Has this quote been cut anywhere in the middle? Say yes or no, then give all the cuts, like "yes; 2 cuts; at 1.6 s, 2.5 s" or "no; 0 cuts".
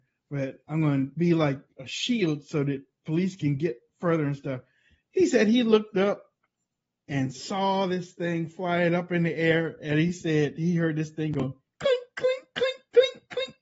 no; 0 cuts